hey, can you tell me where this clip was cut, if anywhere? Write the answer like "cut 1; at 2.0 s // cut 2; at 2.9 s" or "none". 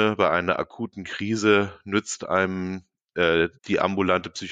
cut 1; at 3.6 s